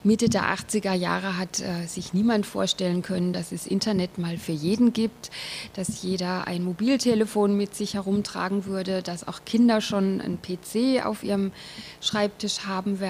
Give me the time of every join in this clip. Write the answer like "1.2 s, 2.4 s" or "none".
none